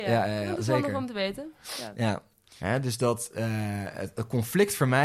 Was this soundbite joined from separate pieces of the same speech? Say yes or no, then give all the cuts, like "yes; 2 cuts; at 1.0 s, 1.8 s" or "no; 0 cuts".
no; 0 cuts